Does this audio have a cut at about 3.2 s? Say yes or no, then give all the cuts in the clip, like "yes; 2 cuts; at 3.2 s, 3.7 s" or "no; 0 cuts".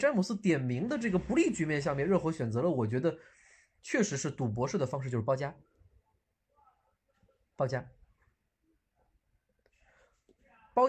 no; 0 cuts